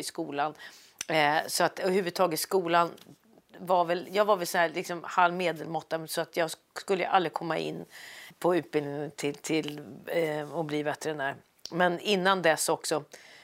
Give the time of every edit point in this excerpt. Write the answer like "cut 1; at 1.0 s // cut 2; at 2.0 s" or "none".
cut 1; at 8.3 s